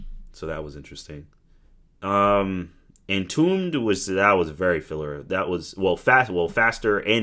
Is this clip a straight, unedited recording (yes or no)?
yes